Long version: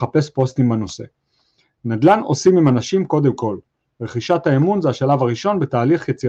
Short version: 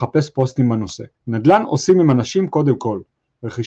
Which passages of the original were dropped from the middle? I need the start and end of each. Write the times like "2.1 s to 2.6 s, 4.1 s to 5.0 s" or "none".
1.2 s to 1.7 s